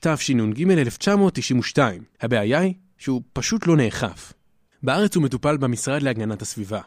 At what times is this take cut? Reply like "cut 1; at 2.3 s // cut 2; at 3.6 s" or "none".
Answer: cut 1; at 2.1 s // cut 2; at 4.7 s